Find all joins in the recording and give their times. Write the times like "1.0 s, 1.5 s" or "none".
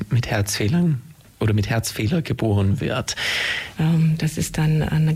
3.7 s